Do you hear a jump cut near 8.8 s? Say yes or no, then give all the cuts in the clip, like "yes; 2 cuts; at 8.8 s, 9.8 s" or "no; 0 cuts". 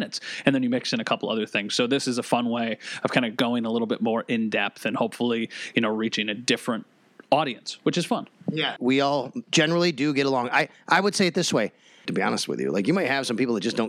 yes; 2 cuts; at 8.8 s, 12.1 s